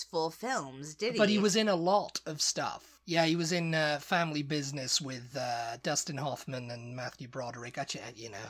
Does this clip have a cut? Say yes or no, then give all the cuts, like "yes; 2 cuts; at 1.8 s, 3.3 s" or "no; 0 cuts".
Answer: no; 0 cuts